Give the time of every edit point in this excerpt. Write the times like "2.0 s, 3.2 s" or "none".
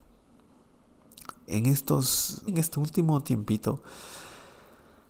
1.5 s, 2.5 s